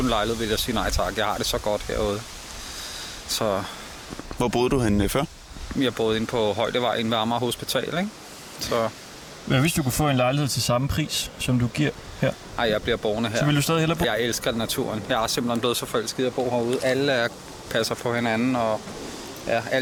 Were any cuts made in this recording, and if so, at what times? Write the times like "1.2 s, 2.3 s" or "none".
14.0 s